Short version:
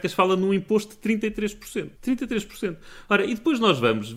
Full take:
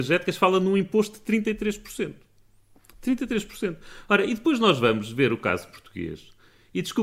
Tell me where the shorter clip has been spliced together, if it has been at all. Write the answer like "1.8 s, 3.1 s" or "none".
2.0 s